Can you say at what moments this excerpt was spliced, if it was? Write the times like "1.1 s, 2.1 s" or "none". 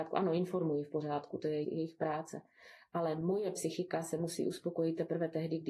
1.6 s